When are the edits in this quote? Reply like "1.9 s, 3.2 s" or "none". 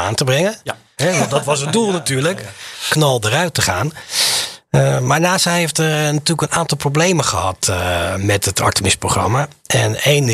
1.0 s, 2.9 s